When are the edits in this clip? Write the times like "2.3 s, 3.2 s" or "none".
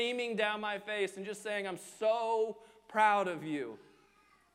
none